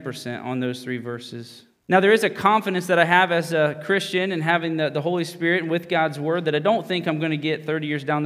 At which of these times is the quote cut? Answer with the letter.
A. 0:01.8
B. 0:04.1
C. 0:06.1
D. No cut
A